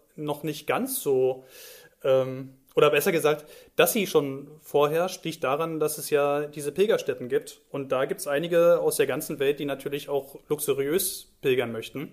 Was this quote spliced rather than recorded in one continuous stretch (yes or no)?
no